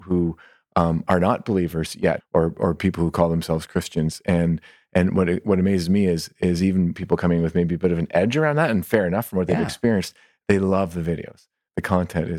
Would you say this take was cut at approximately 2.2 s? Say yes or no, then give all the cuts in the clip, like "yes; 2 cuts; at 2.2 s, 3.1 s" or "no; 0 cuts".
yes; 1 cut; at 2.2 s